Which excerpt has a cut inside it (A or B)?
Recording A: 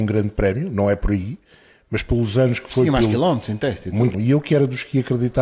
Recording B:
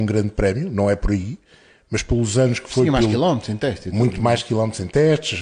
A